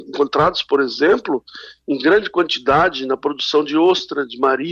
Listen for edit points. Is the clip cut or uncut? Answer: uncut